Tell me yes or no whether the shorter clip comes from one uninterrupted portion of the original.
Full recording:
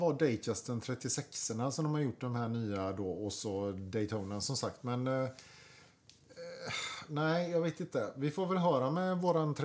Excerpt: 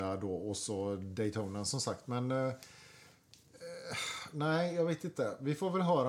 yes